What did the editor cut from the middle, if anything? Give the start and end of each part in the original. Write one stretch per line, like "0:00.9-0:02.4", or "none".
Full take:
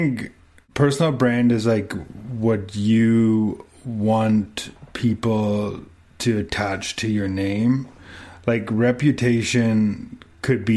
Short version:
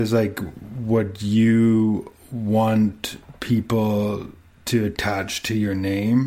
none